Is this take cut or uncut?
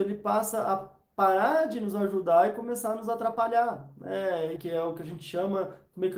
cut